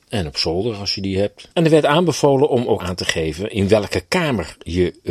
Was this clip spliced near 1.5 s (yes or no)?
yes